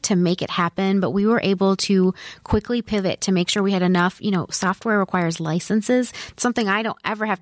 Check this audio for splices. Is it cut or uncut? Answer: uncut